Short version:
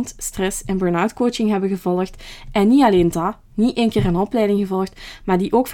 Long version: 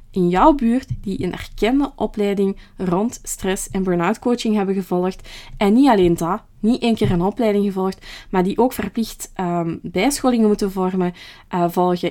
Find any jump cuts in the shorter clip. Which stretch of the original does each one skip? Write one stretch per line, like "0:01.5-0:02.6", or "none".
none